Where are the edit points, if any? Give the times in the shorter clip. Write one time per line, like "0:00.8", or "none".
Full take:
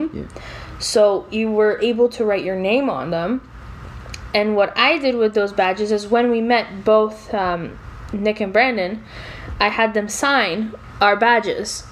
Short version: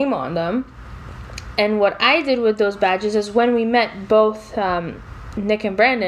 none